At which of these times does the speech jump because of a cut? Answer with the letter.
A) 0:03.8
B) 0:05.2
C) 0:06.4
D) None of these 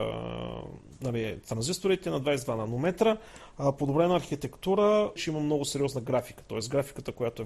B